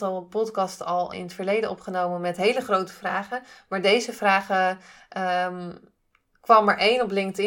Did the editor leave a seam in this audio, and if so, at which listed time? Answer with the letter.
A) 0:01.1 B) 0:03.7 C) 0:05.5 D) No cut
A